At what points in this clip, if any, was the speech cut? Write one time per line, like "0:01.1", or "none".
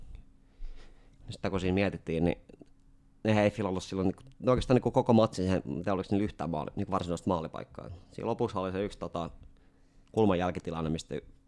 none